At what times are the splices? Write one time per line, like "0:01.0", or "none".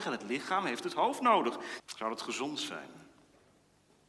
0:01.8